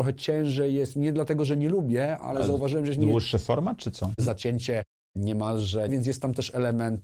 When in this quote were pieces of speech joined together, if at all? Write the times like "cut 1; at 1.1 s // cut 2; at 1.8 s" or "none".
cut 1; at 4.2 s // cut 2; at 5.9 s